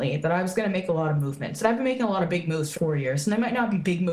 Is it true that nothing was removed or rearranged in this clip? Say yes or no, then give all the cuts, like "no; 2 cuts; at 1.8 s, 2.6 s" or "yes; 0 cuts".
no; 1 cut; at 2.8 s